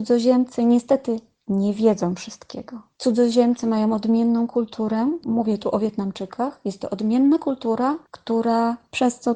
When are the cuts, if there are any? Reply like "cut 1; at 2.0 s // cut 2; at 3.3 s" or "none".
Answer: cut 1; at 8.1 s

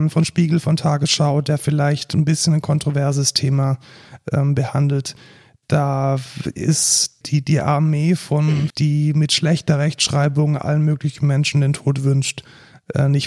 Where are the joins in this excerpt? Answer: cut 1; at 7.2 s // cut 2; at 8.7 s

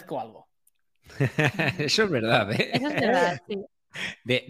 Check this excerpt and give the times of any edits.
none

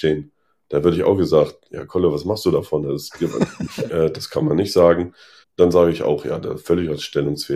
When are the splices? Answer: cut 1; at 3.9 s // cut 2; at 5.4 s

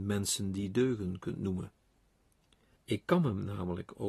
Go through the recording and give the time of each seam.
cut 1; at 2.8 s

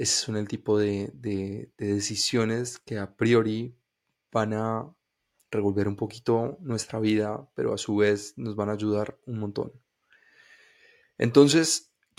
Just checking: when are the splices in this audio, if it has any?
none

